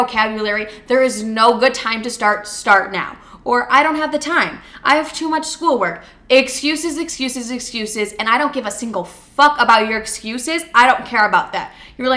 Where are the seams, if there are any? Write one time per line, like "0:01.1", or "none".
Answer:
none